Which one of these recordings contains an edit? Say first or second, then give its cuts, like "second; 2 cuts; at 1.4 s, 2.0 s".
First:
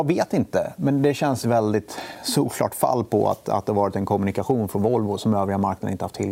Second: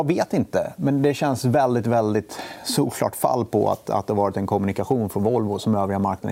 first; 1 cut; at 1.4 s